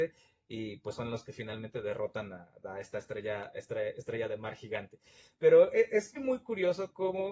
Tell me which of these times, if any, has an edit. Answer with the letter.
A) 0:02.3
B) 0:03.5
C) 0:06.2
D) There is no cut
C